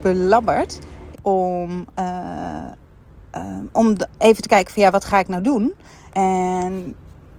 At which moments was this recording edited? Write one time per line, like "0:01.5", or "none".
0:01.1
0:06.1